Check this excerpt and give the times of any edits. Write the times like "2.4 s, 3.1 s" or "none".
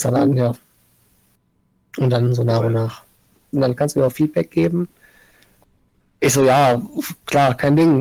3.5 s